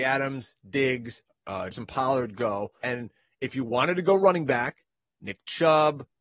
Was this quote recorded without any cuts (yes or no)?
no